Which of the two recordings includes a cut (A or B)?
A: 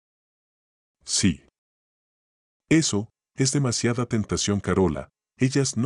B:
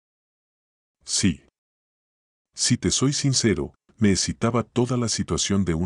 B